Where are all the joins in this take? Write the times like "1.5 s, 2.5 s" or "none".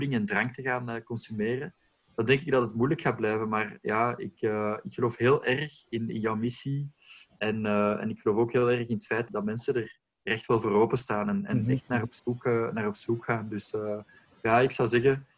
9.3 s